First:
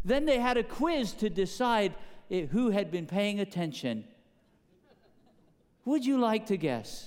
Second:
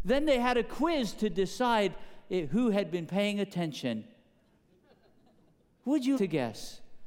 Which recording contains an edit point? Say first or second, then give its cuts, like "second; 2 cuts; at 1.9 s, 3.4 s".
second; 1 cut; at 6.1 s